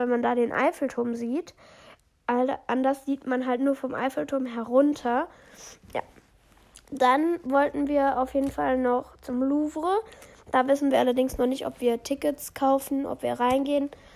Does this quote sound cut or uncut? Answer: uncut